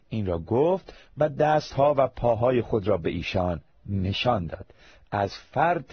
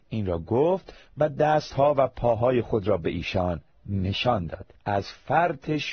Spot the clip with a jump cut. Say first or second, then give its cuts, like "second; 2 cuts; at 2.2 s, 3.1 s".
second; 1 cut; at 4.8 s